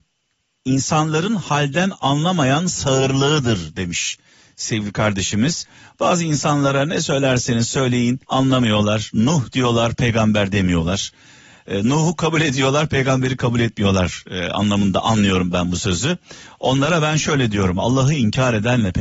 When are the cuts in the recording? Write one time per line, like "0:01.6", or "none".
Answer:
0:08.2